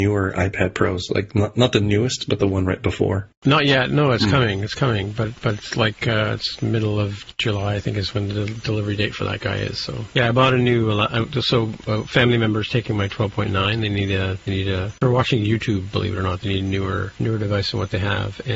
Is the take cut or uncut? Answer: uncut